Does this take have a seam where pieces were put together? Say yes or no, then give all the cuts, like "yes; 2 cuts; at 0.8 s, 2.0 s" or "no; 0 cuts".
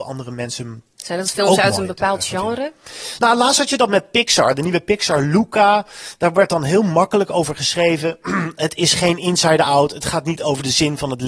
no; 0 cuts